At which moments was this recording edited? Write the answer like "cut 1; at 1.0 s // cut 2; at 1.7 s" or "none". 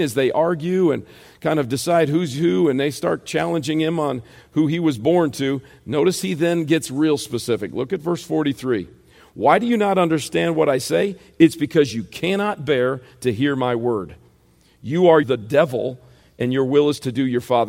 cut 1; at 15.2 s